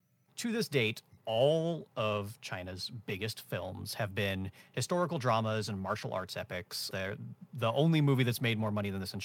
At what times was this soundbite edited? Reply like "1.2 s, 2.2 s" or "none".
6.9 s